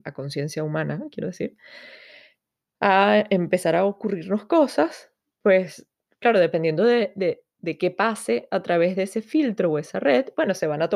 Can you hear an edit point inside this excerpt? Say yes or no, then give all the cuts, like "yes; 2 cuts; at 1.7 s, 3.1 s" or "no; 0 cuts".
no; 0 cuts